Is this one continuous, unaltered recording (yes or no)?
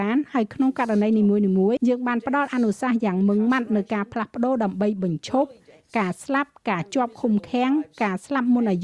no